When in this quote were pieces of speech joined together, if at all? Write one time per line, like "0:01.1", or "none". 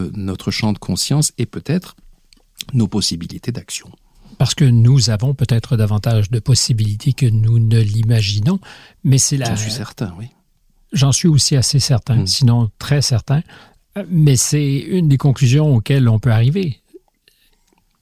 none